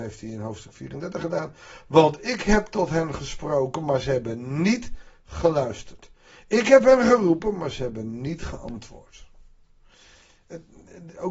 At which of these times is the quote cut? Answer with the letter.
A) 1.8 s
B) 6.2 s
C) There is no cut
C